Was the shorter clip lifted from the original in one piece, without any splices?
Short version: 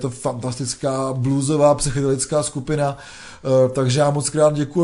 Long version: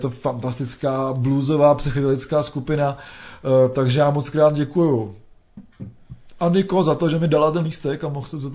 yes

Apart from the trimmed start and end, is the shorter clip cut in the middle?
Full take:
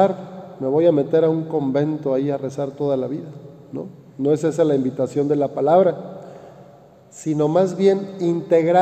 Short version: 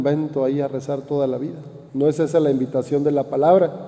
yes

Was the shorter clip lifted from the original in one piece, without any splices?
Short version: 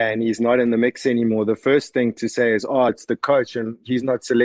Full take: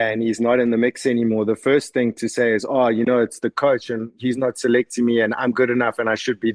no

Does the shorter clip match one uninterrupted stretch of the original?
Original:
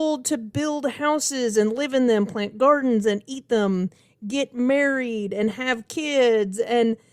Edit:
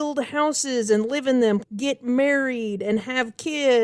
no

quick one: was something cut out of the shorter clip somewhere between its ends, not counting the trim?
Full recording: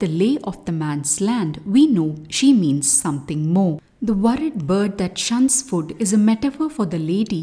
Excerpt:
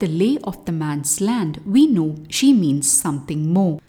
no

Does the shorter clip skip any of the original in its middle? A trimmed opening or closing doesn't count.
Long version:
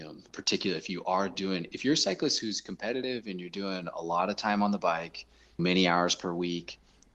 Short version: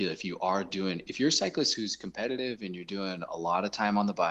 no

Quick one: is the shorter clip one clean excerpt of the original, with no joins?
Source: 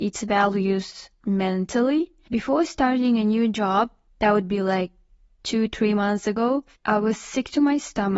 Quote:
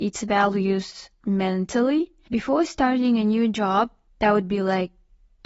yes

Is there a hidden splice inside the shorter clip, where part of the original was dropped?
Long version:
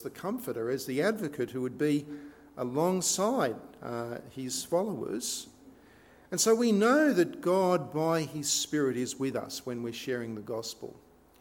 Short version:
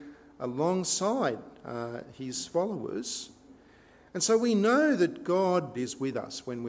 yes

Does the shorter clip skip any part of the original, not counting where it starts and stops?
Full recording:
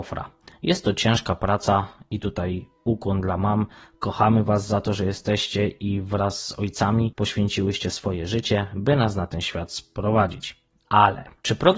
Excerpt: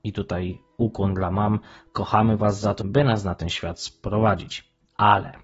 yes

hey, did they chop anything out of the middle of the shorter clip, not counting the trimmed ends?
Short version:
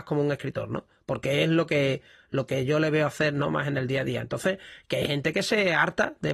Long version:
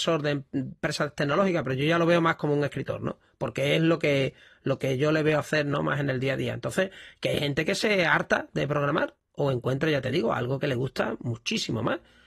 no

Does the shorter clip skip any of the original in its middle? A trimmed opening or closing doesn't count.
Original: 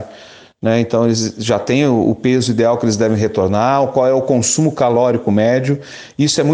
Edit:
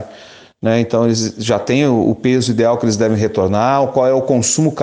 no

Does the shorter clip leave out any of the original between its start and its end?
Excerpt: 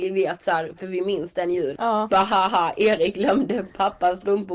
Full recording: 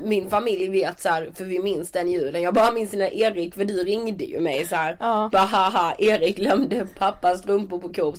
yes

